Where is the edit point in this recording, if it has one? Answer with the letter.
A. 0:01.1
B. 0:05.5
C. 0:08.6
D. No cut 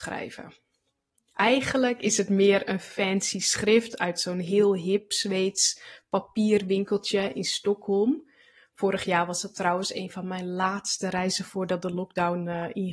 A